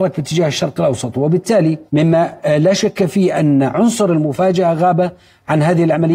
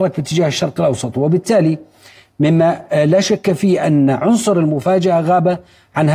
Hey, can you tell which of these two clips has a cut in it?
first; 1 cut; at 1.9 s

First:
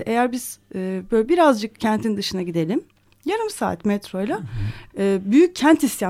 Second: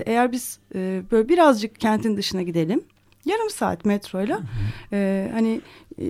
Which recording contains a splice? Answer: first; 1 cut; at 4.9 s

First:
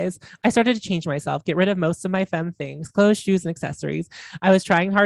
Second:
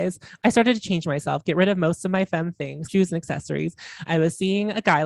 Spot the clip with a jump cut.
second; 2 cuts; at 2.9 s, 4.1 s

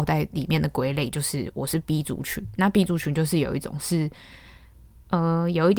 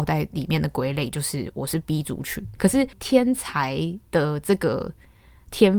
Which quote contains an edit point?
second; 1 cut; at 2.6 s

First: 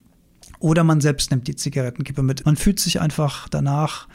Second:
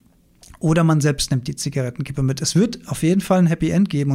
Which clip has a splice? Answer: first; 1 cut; at 2.4 s

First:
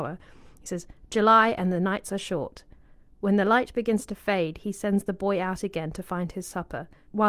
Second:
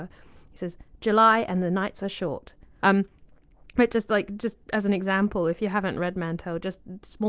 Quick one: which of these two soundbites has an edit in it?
second; 1 cut; at 2.8 s

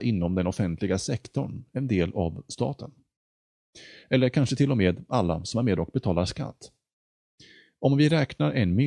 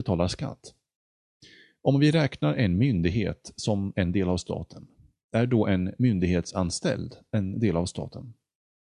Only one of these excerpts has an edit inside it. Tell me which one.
first; 1 cut; at 4.0 s

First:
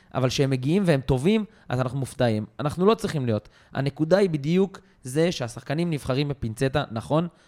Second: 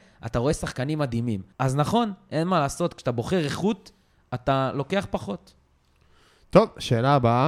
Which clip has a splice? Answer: second; 1 cut; at 1.5 s

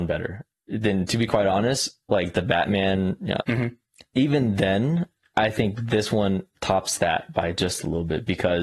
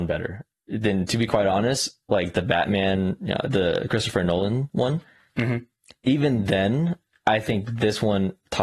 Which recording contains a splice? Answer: first; 1 cut; at 3.4 s

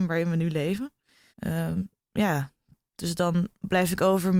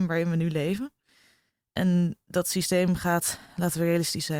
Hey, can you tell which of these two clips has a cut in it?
first; 1 cut; at 1.3 s

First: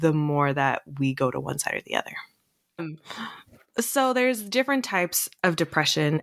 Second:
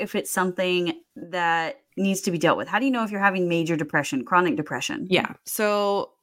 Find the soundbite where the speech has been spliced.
first; 1 cut; at 2.8 s

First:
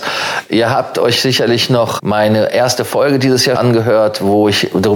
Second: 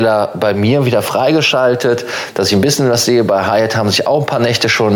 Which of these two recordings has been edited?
first; 2 cuts; at 2.0 s, 3.5 s

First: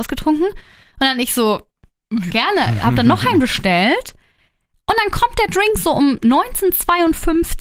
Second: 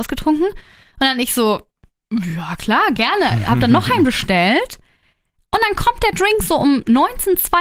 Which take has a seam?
first; 1 cut; at 2.3 s

